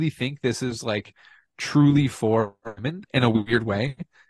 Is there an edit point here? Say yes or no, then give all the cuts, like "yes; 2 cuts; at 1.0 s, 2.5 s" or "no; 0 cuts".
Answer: no; 0 cuts